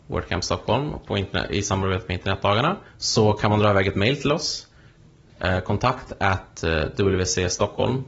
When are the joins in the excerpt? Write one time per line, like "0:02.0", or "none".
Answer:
0:02.9